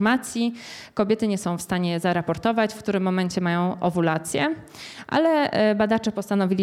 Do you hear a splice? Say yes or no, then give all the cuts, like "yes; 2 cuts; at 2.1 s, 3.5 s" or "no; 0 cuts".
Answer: no; 0 cuts